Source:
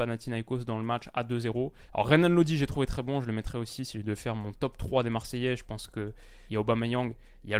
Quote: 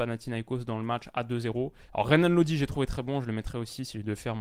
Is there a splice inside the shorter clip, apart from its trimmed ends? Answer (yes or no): no